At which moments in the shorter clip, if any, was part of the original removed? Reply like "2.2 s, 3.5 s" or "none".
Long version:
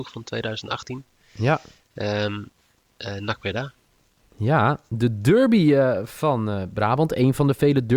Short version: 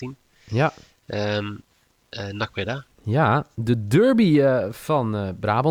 2.9 s